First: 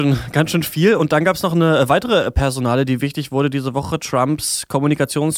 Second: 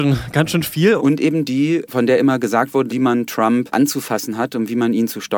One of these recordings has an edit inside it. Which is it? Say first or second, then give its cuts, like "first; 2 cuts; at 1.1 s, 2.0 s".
second; 2 cuts; at 1.0 s, 2.9 s